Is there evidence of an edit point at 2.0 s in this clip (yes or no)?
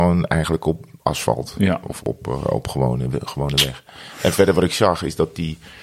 yes